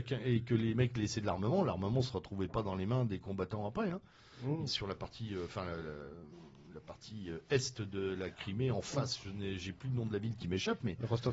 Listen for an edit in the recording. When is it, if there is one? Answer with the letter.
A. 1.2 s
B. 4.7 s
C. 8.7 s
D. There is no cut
B